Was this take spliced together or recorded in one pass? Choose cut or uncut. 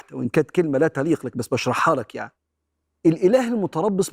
uncut